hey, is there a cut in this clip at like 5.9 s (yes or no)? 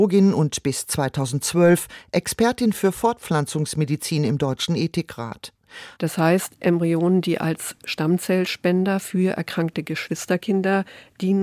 yes